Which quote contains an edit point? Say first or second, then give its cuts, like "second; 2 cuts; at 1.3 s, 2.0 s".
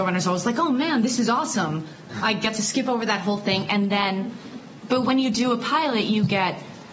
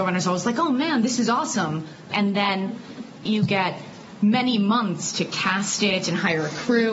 second; 2 cuts; at 2.1 s, 3.3 s